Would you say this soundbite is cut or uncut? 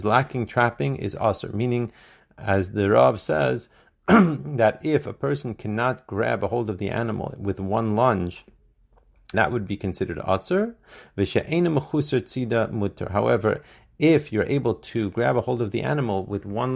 cut